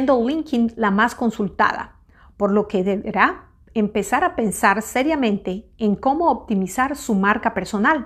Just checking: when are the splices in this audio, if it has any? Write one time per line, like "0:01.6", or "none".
none